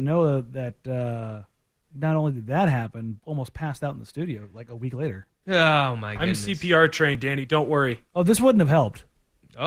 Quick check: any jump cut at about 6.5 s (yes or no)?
no